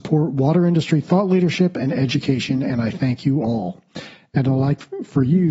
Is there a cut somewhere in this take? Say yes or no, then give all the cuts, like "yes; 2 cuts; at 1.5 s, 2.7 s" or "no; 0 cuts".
no; 0 cuts